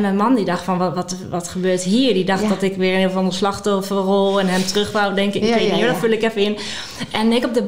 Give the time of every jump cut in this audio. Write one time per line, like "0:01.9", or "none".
none